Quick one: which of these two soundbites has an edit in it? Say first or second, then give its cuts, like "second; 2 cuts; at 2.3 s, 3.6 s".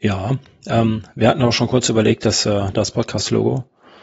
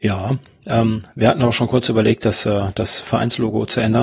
first; 1 cut; at 2.7 s